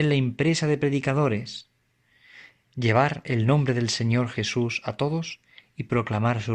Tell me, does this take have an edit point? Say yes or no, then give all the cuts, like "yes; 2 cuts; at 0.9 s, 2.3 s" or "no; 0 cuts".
no; 0 cuts